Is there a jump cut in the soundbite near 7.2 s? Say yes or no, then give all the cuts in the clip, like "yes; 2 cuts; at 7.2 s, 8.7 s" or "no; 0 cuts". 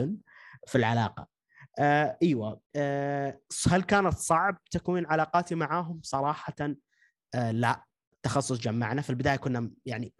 no; 1 cut; at 2.7 s